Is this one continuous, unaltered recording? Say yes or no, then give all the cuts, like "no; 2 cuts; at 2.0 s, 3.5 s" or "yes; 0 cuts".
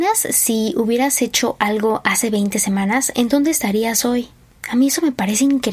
yes; 0 cuts